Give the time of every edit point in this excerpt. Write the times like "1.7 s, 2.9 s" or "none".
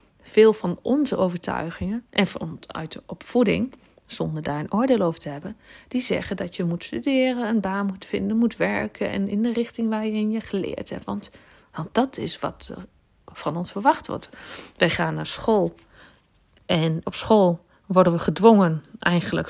17.0 s